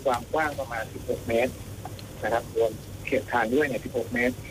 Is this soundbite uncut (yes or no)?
yes